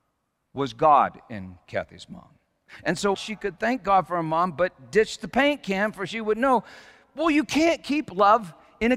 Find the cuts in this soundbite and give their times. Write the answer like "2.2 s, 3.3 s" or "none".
3.1 s